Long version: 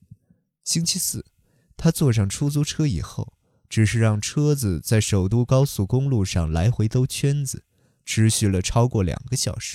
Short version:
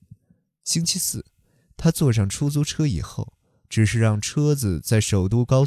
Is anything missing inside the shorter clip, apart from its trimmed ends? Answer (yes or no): no